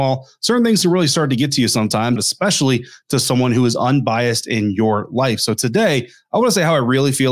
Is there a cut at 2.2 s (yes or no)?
yes